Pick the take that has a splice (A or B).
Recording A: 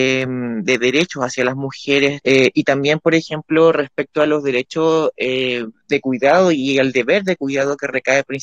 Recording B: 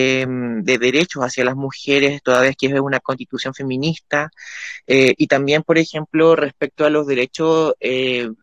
A